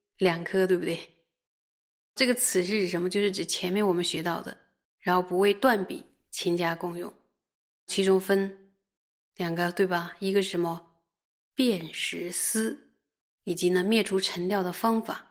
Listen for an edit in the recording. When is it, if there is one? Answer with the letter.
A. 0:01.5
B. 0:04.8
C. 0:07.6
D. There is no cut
B